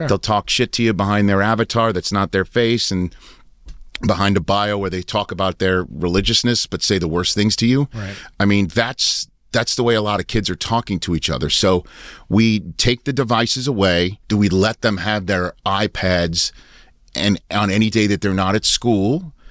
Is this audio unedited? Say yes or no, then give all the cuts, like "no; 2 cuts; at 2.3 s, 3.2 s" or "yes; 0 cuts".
no; 1 cut; at 14.2 s